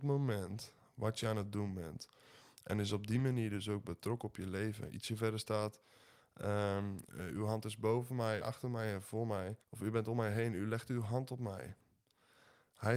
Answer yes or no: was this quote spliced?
yes